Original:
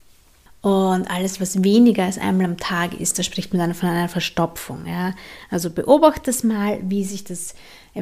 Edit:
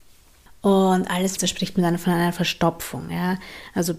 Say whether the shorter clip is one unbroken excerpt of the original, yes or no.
no